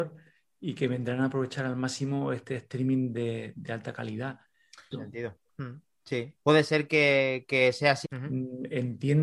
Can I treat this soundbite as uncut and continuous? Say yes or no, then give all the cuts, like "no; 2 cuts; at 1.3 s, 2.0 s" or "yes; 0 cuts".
no; 3 cuts; at 4.9 s, 6.4 s, 8.0 s